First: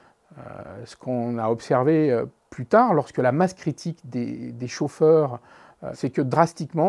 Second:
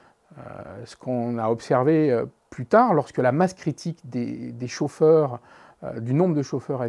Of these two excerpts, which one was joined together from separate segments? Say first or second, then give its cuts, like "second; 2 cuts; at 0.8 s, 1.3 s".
first; 1 cut; at 5.9 s